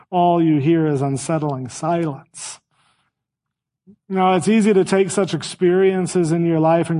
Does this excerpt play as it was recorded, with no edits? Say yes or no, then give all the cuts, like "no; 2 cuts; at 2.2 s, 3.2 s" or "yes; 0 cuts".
yes; 0 cuts